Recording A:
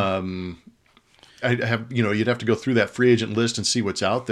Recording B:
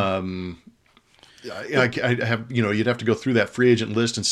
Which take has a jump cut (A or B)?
A